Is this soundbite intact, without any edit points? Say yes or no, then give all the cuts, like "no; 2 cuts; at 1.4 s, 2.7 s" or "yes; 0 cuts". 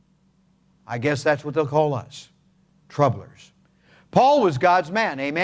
yes; 0 cuts